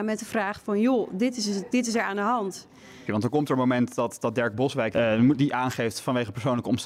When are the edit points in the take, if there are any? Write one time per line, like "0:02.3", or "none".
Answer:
0:03.1
0:04.9